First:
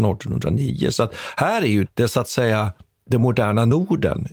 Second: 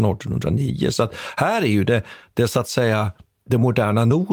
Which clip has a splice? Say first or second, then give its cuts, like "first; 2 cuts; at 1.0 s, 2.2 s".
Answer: first; 1 cut; at 1.9 s